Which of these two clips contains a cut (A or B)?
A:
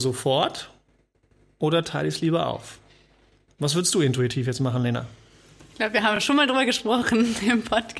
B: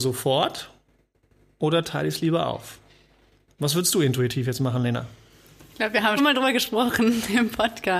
B